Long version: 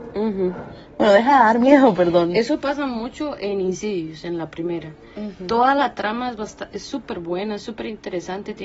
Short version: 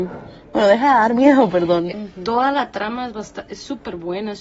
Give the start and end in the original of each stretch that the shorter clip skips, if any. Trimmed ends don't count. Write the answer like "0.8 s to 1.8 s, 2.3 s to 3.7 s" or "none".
2.3 s to 5.1 s